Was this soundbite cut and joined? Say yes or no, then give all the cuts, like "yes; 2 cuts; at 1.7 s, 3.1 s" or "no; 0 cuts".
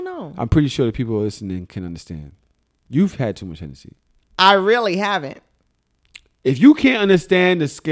yes; 1 cut; at 1.7 s